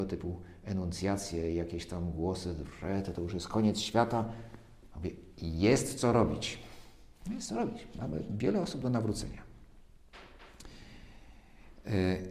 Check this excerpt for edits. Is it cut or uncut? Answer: uncut